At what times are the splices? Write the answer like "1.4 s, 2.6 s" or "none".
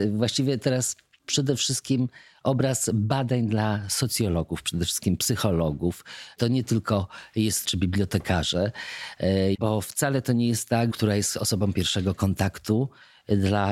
7.6 s, 9.5 s, 10.9 s